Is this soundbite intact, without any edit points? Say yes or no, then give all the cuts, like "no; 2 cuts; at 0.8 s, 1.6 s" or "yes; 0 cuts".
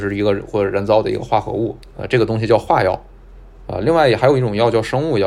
yes; 0 cuts